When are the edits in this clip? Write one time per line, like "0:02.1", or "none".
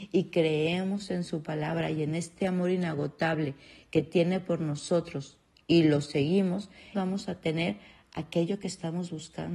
0:06.9